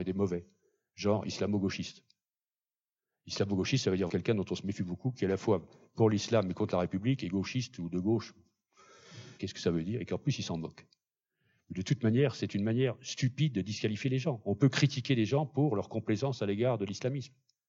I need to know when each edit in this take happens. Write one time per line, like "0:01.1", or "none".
0:04.1
0:09.4